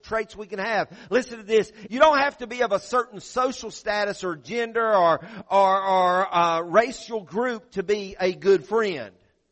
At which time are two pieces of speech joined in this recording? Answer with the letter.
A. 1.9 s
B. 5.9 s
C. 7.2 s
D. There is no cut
A